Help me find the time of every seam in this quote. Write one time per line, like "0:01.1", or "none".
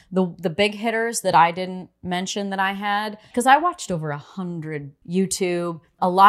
0:05.0